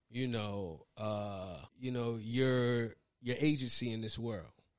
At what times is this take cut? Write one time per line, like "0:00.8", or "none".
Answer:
0:01.7